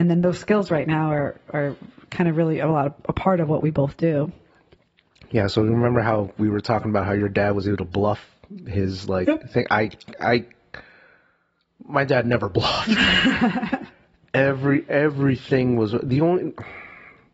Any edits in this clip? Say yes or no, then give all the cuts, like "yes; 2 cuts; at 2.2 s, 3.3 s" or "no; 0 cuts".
no; 0 cuts